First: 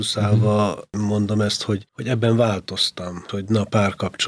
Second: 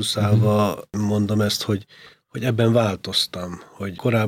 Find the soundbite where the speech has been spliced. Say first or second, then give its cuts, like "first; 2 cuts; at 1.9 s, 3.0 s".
first; 2 cuts; at 1.9 s, 3.3 s